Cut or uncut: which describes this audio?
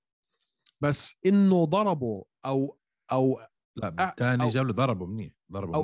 uncut